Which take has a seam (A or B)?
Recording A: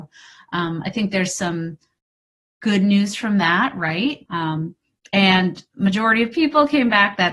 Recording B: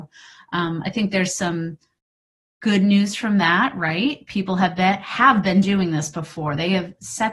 A